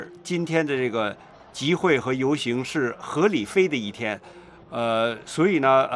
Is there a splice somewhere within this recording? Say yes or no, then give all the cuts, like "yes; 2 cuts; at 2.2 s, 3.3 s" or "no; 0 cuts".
no; 0 cuts